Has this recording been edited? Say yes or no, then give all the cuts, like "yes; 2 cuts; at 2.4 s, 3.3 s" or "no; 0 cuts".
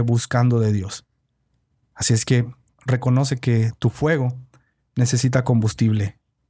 yes; 1 cut; at 2.7 s